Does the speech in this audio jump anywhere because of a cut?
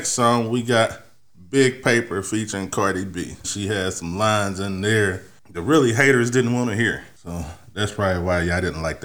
yes; 1 cut; at 3.4 s

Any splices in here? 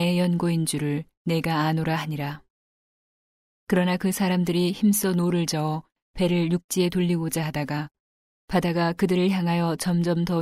no; 0 cuts

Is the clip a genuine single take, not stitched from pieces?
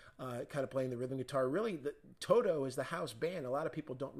yes; 0 cuts

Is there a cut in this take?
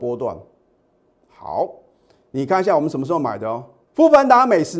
yes; 1 cut; at 3.9 s

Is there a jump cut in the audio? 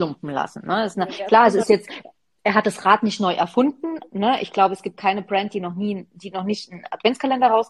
no; 0 cuts

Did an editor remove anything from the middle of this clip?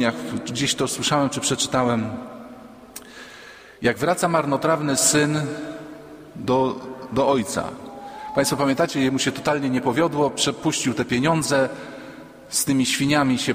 no; 0 cuts

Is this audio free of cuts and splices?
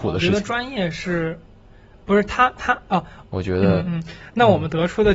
no; 1 cut; at 3.2 s

